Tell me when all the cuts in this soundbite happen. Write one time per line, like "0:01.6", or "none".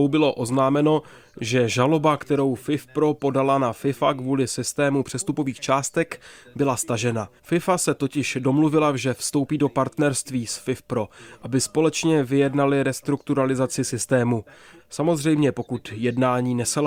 0:07.4
0:14.8